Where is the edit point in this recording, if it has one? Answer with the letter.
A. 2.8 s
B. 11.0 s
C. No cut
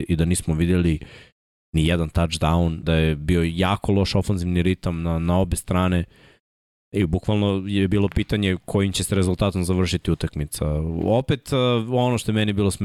A